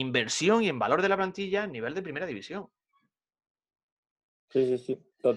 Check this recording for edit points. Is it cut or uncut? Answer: uncut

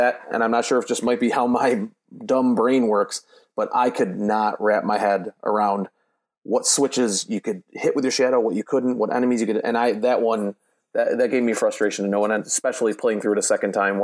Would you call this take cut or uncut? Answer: uncut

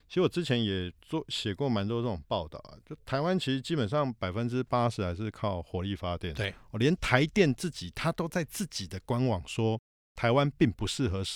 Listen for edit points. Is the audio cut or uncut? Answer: uncut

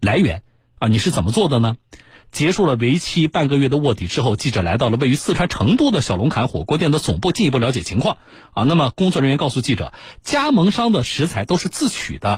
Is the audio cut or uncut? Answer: uncut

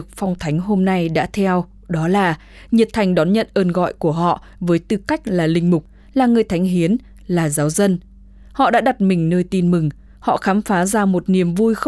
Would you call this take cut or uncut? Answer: uncut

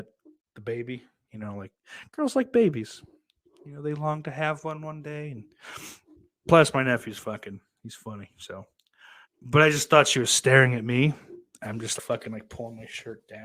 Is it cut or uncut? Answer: cut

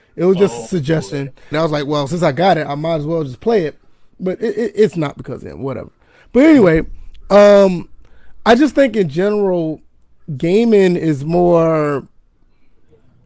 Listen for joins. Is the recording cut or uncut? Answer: cut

